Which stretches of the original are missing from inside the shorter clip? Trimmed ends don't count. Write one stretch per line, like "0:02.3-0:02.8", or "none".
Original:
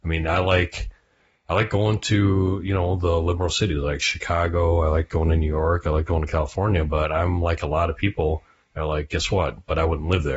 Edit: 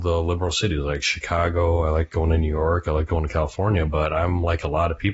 none